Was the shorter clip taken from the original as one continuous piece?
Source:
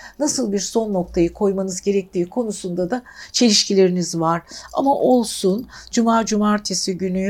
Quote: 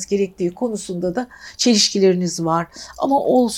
yes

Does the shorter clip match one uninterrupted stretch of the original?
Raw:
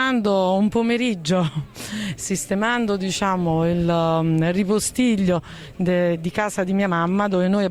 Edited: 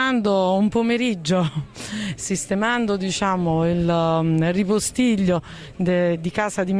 yes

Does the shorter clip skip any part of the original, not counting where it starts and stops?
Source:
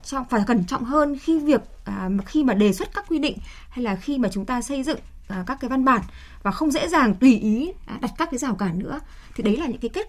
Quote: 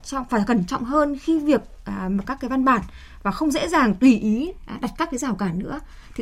yes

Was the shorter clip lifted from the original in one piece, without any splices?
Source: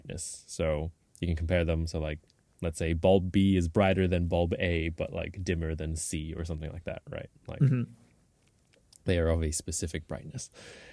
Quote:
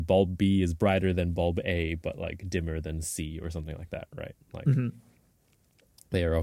yes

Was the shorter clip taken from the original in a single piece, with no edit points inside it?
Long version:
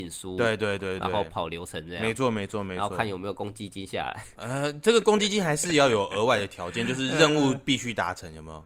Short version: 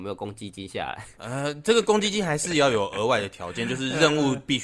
yes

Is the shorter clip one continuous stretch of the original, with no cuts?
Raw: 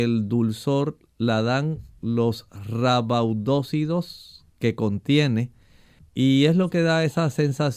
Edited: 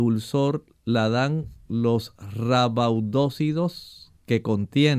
yes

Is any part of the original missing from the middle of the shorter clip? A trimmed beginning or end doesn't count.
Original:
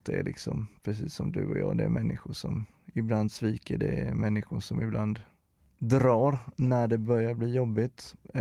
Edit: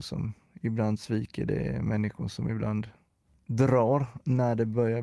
no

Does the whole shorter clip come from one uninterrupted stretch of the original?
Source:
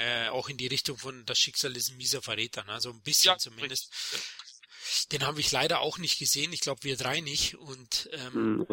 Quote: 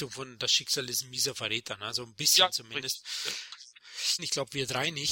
no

